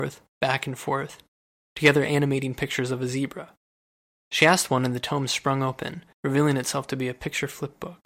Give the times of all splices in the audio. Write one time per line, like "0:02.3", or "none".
0:04.2
0:06.1